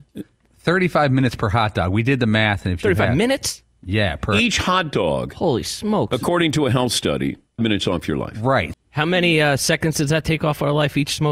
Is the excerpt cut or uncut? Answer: cut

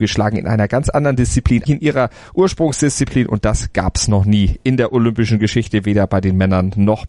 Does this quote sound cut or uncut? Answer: cut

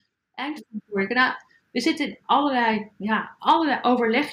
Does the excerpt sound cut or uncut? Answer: uncut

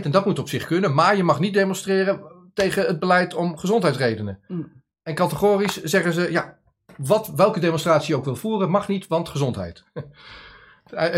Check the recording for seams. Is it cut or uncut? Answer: uncut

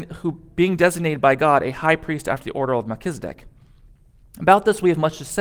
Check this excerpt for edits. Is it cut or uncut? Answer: uncut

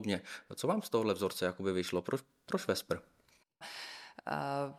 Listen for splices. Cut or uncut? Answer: cut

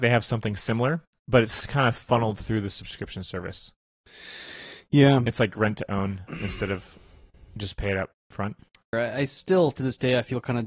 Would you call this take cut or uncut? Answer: cut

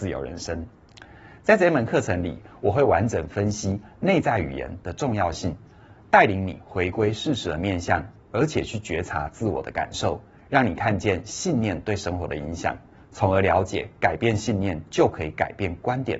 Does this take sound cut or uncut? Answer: uncut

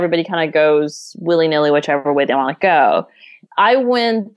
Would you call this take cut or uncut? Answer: cut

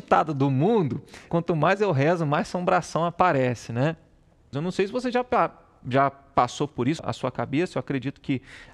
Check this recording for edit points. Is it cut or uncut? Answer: cut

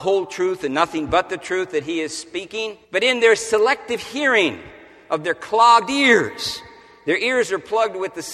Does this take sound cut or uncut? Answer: cut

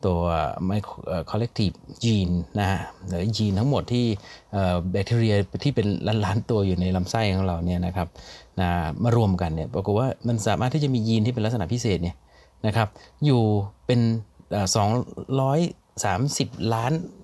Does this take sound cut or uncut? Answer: uncut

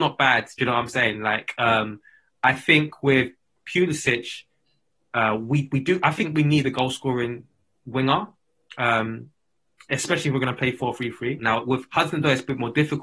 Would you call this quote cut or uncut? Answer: cut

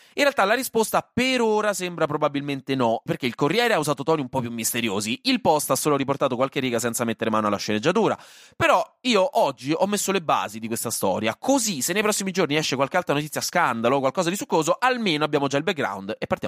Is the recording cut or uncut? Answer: cut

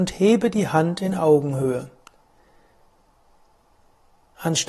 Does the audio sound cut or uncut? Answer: uncut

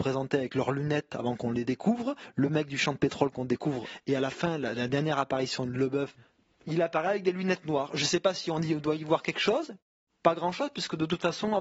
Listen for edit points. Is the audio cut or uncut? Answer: uncut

